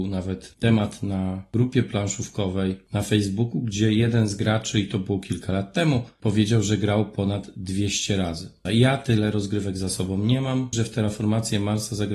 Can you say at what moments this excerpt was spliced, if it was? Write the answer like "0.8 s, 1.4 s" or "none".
8.7 s, 10.7 s